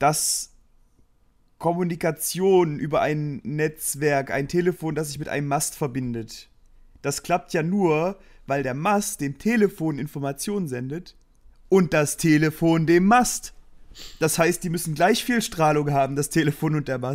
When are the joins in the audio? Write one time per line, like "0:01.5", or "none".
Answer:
none

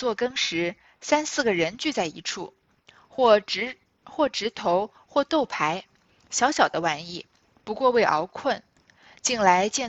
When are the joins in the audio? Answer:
none

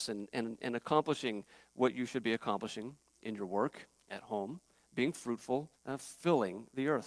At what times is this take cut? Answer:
0:05.8

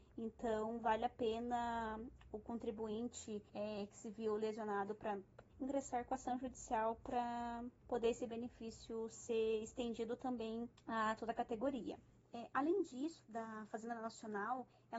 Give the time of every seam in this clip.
0:03.5
0:05.5
0:13.2

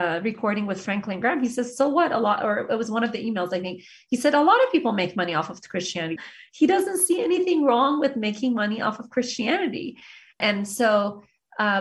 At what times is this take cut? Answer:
0:06.2
0:10.4

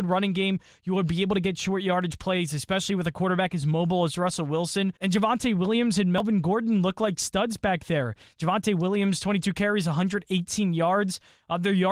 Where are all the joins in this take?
0:05.0

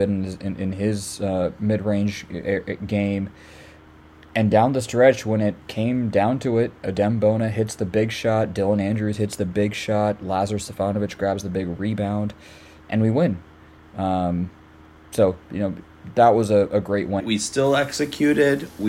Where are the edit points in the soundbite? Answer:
0:17.2

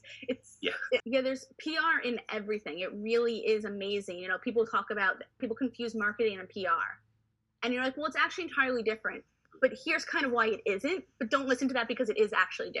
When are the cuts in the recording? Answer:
0:01.0
0:05.4

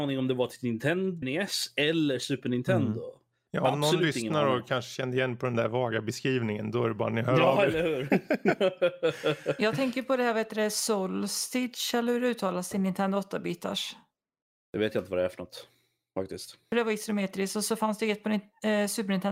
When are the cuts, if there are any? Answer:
0:01.2
0:03.5

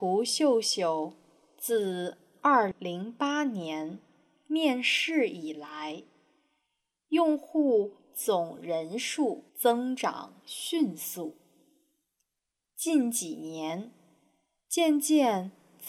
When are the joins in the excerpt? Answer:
0:02.7
0:09.5

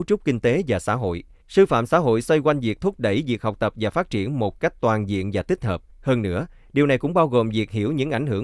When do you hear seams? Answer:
0:01.4
0:05.9

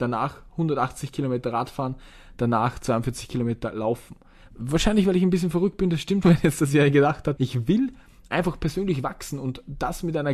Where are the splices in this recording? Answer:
0:04.5
0:06.2
0:07.4

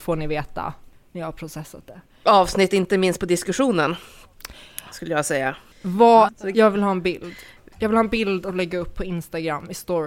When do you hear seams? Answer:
0:02.2
0:06.3

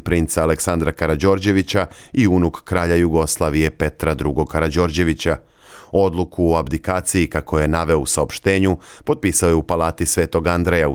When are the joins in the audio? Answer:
none

